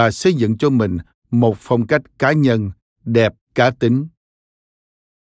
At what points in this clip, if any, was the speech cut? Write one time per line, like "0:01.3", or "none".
0:03.4